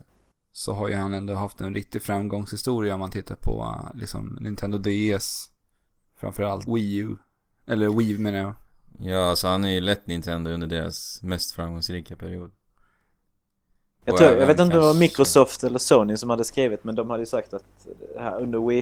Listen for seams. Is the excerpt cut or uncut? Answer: cut